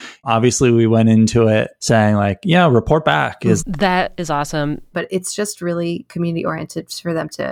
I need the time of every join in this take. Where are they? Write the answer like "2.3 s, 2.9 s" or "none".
3.6 s, 4.9 s